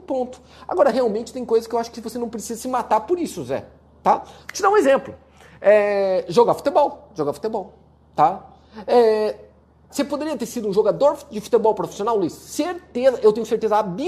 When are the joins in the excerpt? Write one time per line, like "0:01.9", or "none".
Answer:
0:09.9

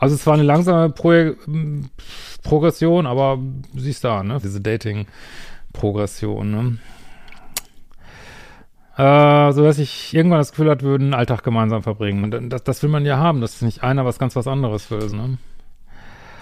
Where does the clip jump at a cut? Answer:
0:04.4
0:12.2
0:15.1

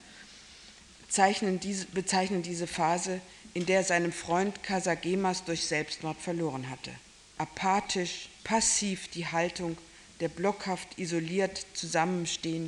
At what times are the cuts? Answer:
0:08.4

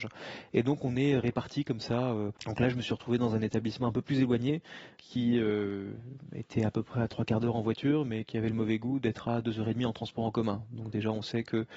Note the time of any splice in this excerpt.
0:02.4
0:05.0

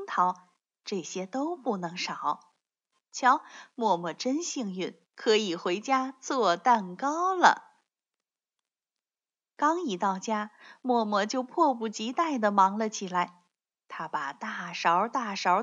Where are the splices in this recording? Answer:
0:05.1

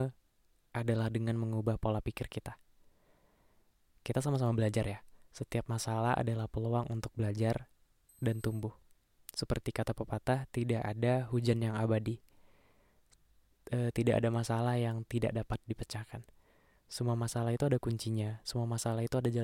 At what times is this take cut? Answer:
none

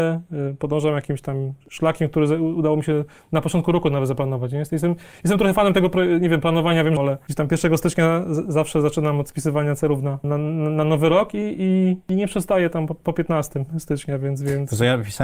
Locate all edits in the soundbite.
0:07.0
0:10.2

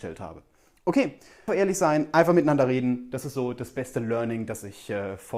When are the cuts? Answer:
0:01.5

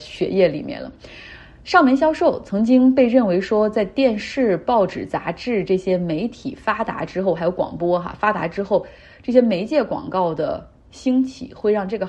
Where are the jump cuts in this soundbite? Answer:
none

